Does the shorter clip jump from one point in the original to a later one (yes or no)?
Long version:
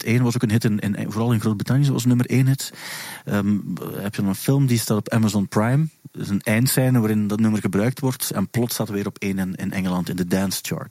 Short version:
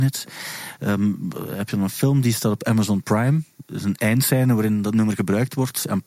no